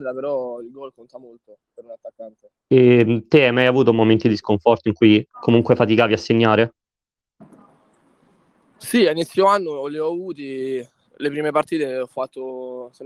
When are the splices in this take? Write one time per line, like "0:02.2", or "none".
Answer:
0:02.6

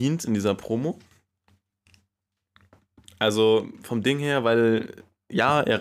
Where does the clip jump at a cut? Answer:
none

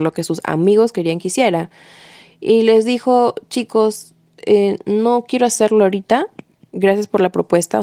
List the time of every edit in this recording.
none

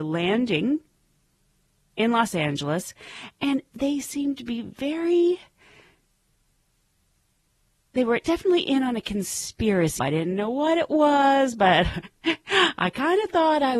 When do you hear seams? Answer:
0:10.0

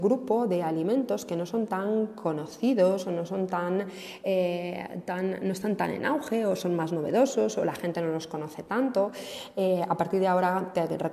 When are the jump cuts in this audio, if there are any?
none

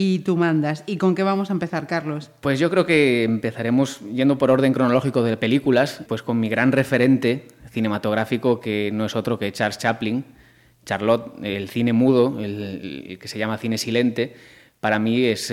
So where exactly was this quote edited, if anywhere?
0:06.1

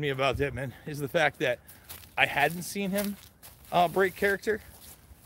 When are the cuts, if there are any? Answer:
none

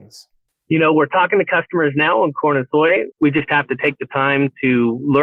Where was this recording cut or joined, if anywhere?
0:03.1

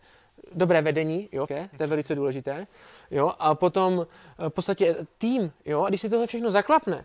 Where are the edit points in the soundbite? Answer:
0:01.5

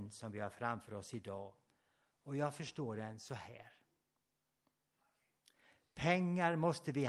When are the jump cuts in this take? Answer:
none

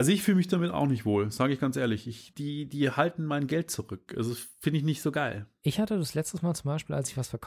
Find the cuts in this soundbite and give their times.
0:02.3

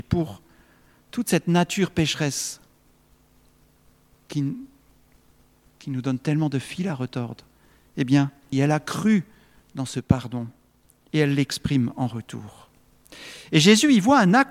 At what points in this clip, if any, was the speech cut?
0:08.5

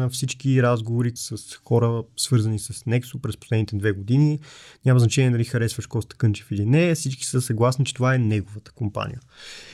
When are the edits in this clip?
0:01.2

